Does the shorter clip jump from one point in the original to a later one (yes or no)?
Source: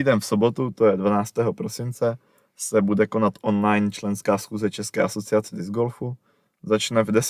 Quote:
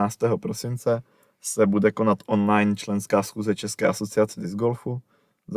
no